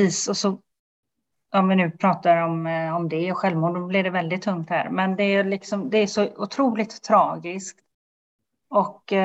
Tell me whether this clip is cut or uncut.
uncut